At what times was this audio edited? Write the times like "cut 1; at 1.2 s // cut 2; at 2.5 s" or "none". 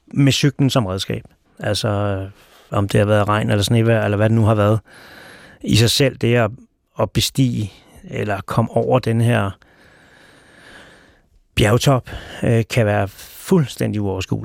cut 1; at 1.5 s

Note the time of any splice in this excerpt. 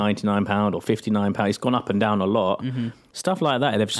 cut 1; at 3.1 s

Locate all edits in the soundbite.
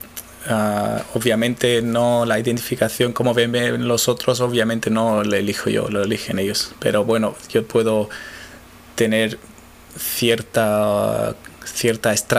none

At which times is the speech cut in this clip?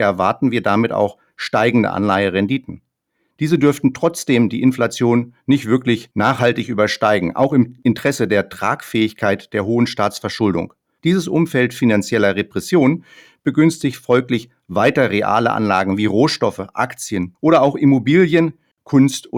cut 1; at 11.0 s

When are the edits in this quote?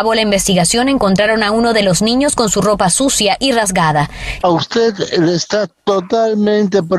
cut 1; at 4.4 s

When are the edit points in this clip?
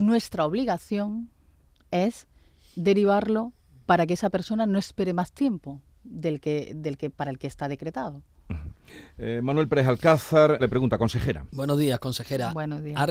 cut 1; at 10.6 s

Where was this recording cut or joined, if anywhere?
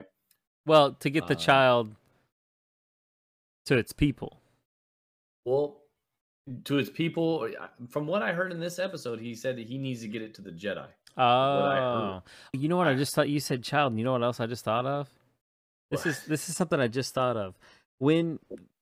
cut 1; at 12.5 s

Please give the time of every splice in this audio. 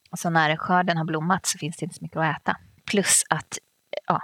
cut 1; at 2.8 s

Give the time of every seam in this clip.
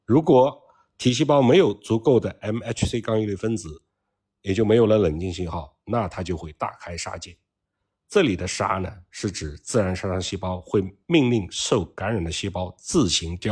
none

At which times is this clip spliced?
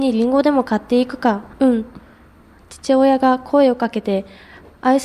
cut 1; at 1.5 s

